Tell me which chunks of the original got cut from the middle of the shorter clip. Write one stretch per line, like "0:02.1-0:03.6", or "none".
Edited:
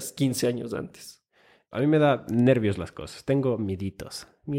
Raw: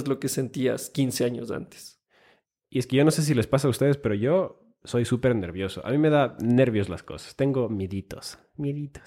0:02.5-0:05.8